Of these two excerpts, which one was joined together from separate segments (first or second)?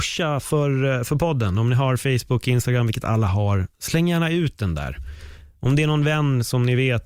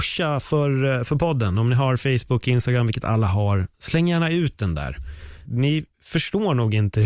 second